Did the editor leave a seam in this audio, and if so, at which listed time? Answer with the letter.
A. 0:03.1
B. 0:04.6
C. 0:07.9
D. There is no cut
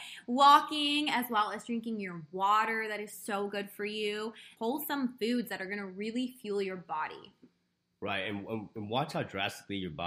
B